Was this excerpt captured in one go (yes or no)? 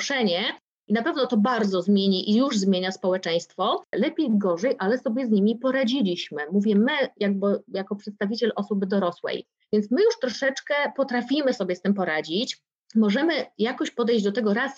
no